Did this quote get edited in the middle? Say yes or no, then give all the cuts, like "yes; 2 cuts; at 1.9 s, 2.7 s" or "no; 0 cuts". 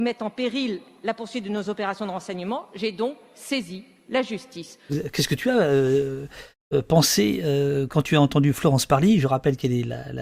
no; 0 cuts